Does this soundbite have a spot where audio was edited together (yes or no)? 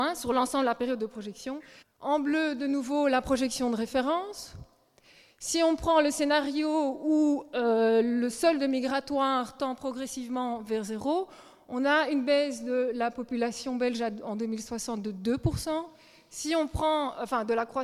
yes